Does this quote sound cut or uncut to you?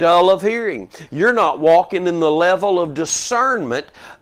cut